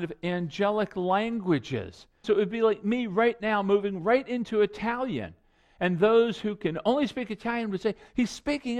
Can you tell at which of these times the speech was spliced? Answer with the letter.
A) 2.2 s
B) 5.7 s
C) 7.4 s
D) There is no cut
A